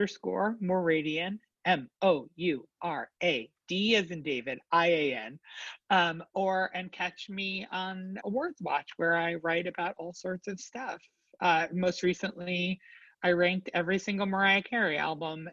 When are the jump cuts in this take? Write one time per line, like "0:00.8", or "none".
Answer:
0:08.2